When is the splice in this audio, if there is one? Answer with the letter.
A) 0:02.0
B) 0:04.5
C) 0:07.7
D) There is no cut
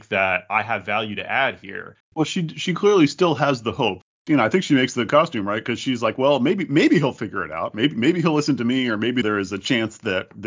A